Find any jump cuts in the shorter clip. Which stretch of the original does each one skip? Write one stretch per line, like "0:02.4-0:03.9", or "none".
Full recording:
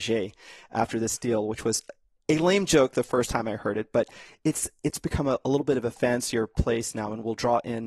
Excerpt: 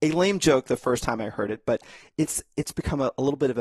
none